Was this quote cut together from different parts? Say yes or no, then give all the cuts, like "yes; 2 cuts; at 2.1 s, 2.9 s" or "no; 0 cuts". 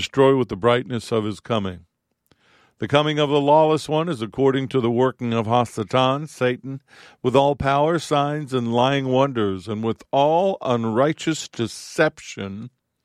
no; 0 cuts